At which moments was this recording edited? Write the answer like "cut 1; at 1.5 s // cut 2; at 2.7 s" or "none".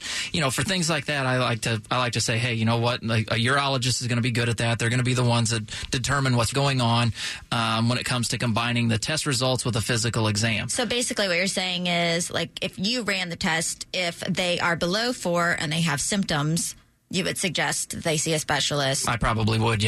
cut 1; at 6.5 s